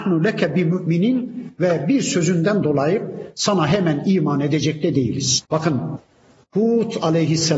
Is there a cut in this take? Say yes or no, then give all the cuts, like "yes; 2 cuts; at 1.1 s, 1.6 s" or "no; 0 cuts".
yes; 1 cut; at 5.5 s